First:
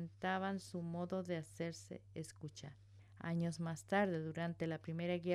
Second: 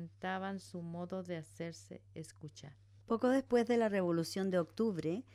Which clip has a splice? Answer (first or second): first